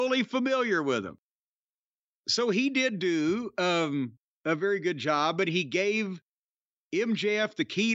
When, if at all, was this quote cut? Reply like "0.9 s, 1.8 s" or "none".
none